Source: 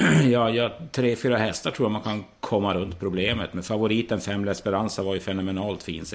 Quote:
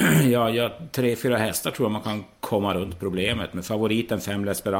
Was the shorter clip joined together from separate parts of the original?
no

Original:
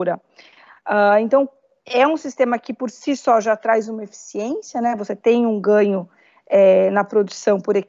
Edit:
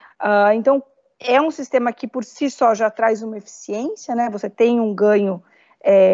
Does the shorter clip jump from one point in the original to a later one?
no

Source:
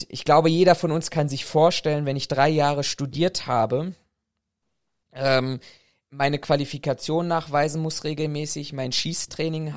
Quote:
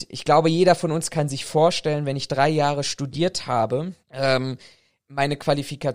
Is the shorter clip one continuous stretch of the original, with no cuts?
no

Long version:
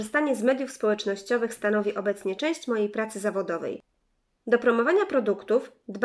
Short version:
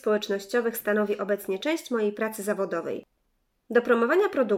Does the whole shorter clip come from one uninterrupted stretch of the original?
yes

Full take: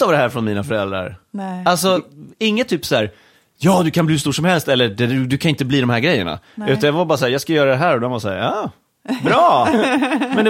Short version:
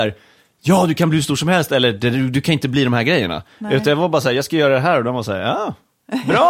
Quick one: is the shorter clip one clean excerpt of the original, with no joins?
yes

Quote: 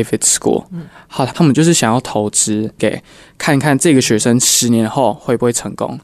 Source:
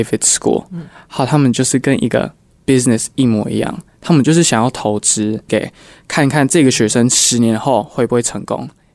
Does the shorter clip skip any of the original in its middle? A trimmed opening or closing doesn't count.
yes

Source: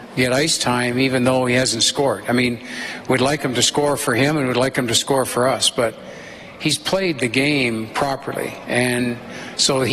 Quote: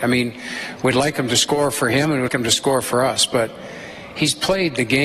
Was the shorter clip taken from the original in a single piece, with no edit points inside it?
no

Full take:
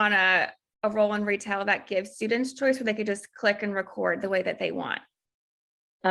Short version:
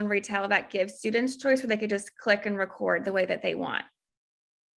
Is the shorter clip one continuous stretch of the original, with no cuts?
yes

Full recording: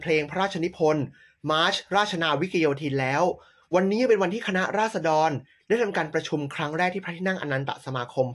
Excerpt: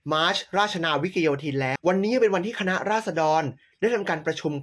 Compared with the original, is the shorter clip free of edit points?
no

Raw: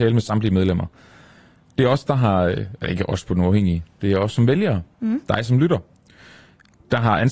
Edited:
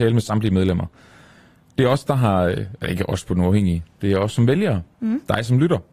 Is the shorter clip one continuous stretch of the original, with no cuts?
yes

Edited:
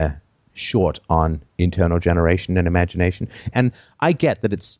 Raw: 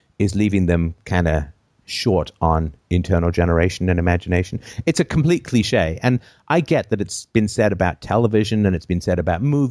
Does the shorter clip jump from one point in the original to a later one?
yes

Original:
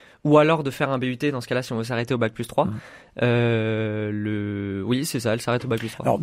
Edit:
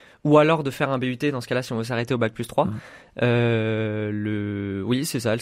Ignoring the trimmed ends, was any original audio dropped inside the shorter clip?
no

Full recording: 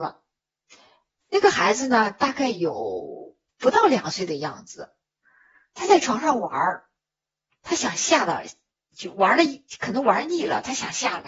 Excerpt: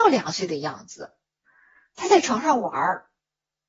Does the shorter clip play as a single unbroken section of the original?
yes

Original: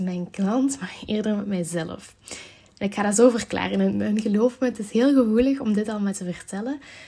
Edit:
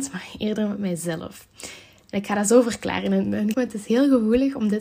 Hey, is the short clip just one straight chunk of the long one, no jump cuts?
no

